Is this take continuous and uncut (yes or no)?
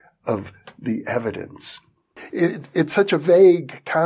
no